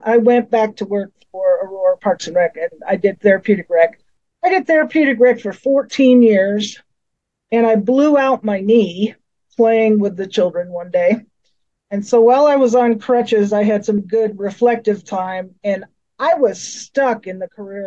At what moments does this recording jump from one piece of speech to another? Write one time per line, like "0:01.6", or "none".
0:14.0